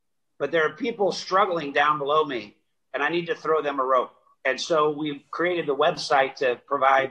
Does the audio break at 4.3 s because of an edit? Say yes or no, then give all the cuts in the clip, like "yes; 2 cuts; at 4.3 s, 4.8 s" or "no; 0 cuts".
yes; 1 cut; at 4.3 s